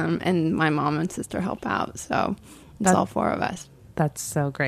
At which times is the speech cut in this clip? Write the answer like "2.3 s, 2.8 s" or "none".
none